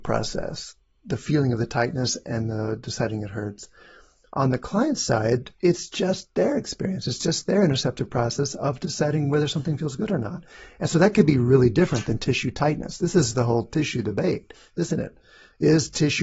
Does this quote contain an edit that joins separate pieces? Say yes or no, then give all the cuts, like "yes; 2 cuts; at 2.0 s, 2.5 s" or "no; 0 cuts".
yes; 1 cut; at 5.6 s